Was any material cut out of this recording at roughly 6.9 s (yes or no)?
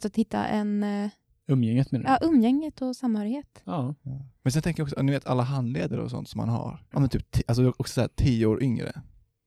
yes